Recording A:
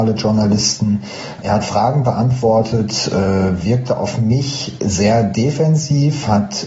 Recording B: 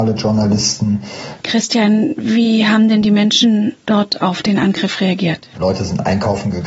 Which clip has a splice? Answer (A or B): B